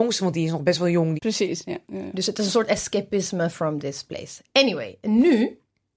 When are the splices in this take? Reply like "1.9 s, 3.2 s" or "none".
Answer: 1.2 s